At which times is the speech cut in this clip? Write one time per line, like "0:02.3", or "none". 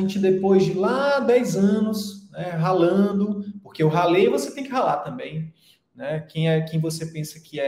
none